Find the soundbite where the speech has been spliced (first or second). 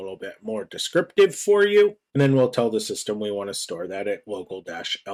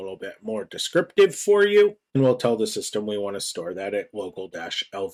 second